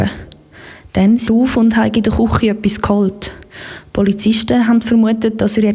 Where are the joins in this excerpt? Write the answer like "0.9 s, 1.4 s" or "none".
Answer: 1.3 s